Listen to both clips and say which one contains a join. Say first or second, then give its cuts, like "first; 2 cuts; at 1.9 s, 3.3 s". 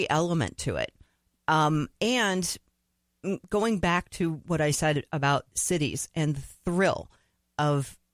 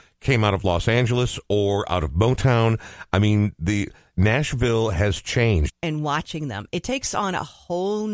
second; 1 cut; at 5.7 s